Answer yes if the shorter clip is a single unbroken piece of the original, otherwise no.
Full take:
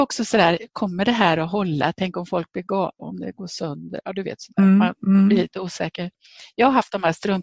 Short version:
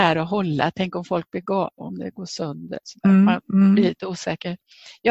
no